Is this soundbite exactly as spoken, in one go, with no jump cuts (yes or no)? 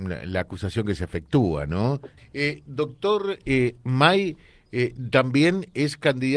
no